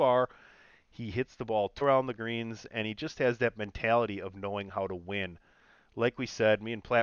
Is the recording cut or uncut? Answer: cut